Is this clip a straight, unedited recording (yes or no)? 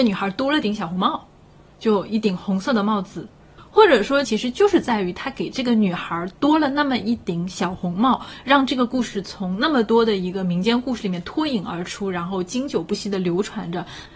no